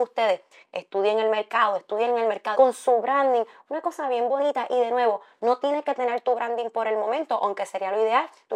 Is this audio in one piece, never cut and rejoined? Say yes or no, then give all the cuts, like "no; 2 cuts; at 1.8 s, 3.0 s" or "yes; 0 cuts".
no; 1 cut; at 2.5 s